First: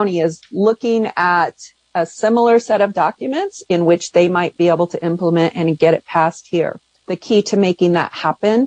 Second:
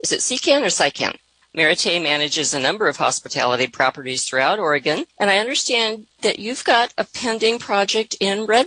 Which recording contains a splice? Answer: second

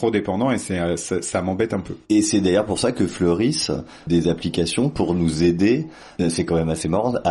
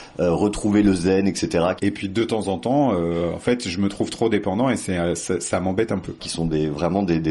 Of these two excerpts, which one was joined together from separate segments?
second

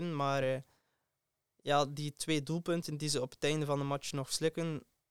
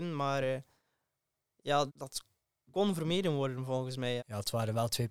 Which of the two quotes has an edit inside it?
second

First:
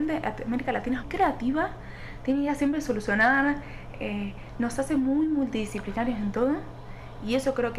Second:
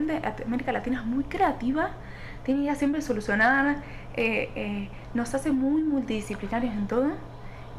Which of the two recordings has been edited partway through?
first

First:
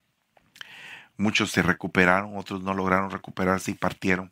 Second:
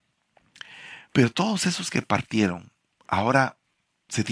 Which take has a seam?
second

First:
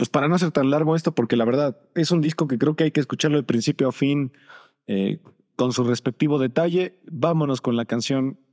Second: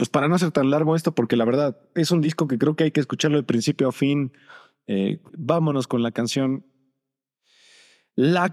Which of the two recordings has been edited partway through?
second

